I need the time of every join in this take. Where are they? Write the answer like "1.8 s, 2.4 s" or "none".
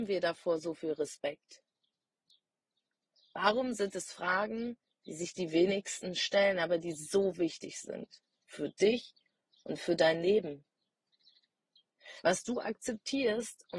12.2 s